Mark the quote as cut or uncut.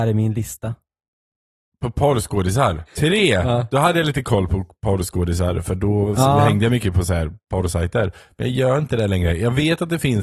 cut